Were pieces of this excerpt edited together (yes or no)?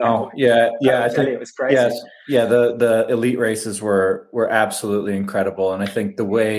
no